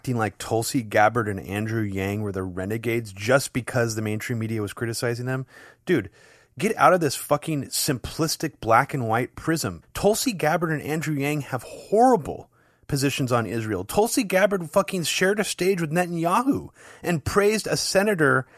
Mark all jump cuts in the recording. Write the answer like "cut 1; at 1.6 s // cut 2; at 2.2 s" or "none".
cut 1; at 9.8 s